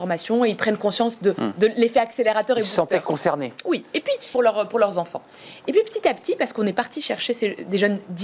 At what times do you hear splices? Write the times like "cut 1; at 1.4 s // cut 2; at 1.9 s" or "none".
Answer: cut 1; at 4.3 s